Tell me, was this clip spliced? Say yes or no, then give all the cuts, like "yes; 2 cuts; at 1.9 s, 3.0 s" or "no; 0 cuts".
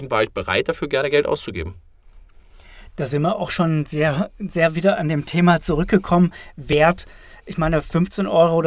no; 0 cuts